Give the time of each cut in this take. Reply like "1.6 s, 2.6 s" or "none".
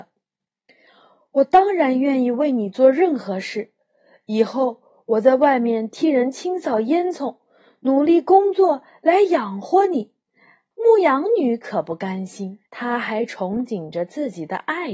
10.7 s, 12.7 s